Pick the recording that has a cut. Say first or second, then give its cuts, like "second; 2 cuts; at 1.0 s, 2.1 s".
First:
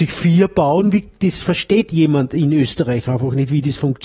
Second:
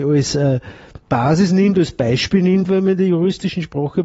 second; 2 cuts; at 1.0 s, 2.6 s